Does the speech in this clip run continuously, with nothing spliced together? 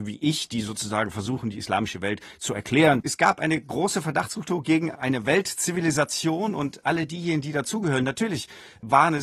no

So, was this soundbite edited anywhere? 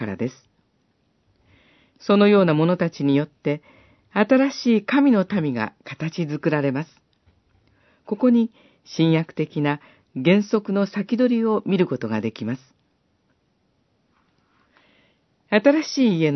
no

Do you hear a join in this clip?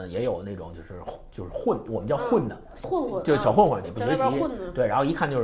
yes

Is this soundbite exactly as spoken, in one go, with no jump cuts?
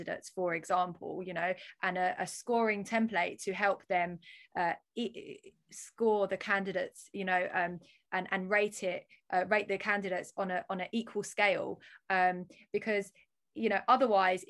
yes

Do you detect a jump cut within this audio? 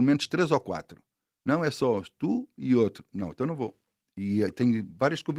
no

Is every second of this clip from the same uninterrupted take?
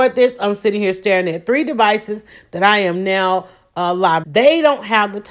no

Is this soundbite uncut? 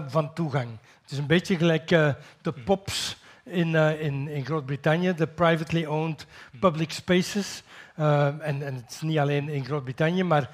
yes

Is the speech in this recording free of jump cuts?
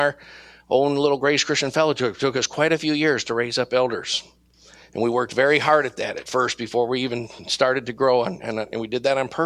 yes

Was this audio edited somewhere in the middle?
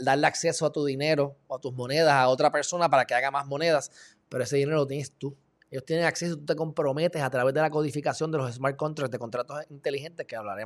no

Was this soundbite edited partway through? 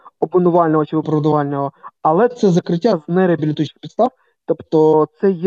no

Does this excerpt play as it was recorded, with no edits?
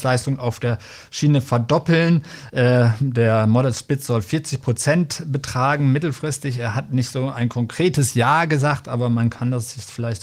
yes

